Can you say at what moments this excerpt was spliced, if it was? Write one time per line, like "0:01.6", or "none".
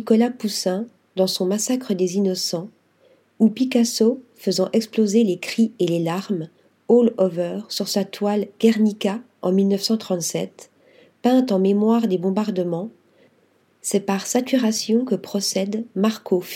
none